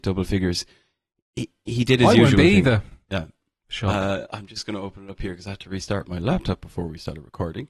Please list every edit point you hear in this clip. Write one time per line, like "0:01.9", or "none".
0:03.6